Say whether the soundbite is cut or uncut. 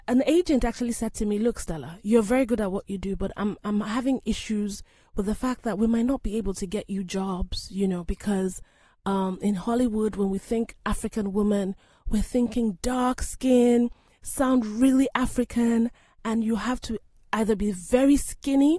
uncut